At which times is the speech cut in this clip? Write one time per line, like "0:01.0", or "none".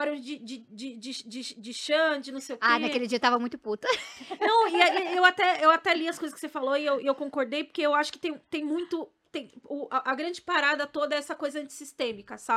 none

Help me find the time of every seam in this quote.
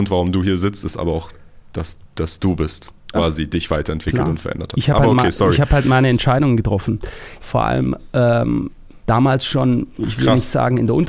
0:03.1
0:07.4
0:09.0

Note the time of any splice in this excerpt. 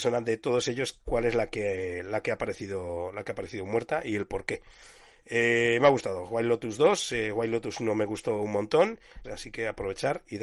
0:09.2

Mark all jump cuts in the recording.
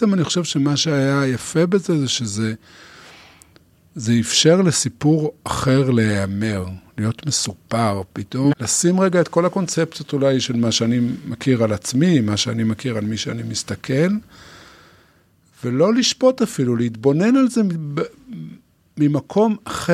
0:08.5

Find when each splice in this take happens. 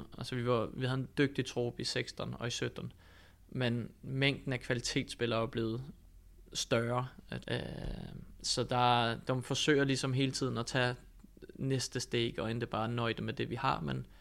0:07.4

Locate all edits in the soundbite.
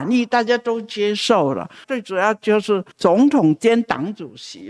0:01.8
0:02.9

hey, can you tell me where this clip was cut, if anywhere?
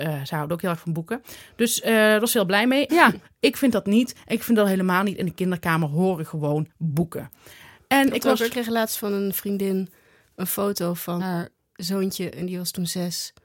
0:02.9
0:11.2

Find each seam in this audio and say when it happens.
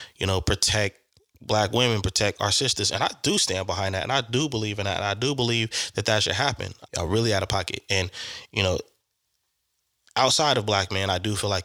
0:06.9

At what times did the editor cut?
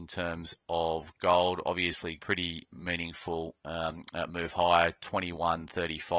0:02.2

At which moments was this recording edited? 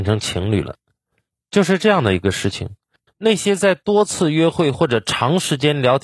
0:03.1

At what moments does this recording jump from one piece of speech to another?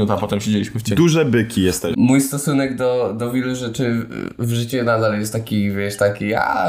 0:01.9

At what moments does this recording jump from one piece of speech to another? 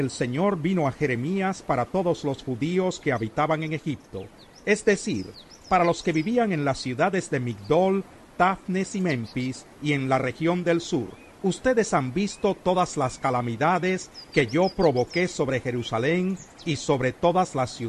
0:11.3

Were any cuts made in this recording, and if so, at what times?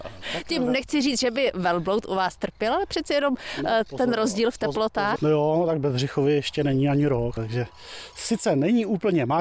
0:05.2
0:07.4

